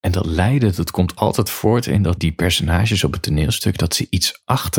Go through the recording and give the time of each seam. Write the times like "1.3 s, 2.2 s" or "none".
2.2 s